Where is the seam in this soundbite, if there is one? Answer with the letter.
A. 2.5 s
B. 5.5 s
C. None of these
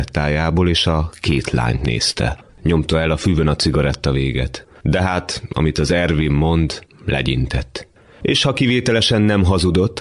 A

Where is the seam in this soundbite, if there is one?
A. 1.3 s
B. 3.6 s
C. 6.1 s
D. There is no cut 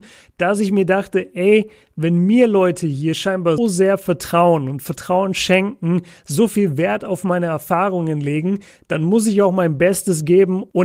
B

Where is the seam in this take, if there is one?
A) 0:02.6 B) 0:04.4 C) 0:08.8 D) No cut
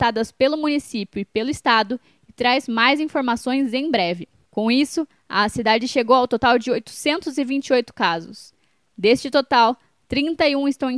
B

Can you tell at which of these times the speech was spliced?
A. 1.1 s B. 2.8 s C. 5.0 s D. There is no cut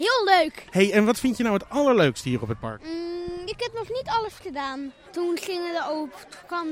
C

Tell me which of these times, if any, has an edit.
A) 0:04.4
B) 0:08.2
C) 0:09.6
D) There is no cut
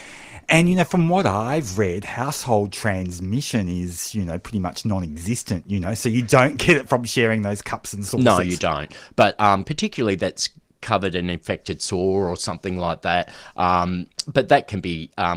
C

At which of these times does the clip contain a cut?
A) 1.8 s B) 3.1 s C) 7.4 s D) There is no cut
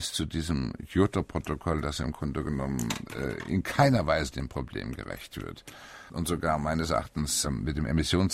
C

